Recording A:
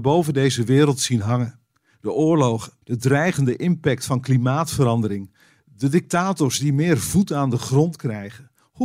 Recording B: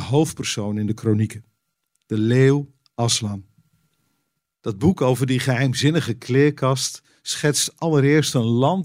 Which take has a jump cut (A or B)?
A